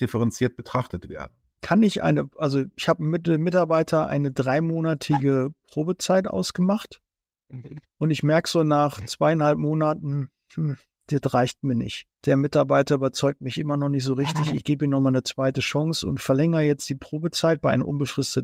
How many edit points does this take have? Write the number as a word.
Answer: one